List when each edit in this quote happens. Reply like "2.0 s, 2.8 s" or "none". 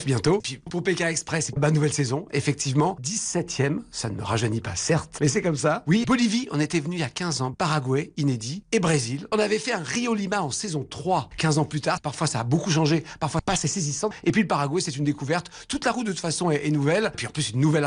none